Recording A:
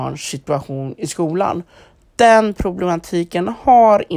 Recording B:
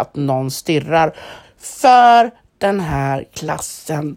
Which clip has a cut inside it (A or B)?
B